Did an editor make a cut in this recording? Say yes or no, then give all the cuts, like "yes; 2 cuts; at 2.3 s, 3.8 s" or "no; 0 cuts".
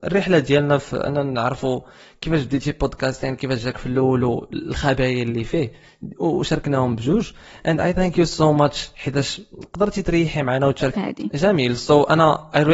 yes; 1 cut; at 10.9 s